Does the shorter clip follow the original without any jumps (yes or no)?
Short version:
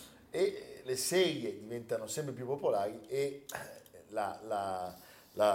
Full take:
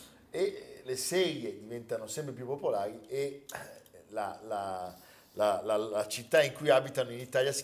yes